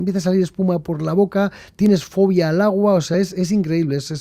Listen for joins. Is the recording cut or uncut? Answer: uncut